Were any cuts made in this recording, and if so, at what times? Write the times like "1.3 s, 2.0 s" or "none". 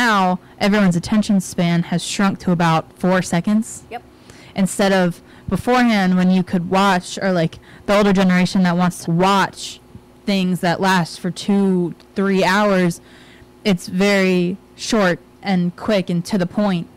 9.1 s